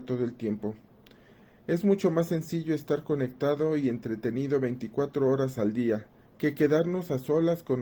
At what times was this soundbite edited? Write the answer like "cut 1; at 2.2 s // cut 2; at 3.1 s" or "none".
cut 1; at 6.2 s